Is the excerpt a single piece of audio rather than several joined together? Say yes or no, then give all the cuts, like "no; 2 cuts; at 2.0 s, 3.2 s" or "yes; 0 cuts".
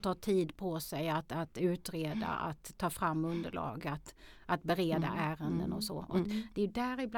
yes; 0 cuts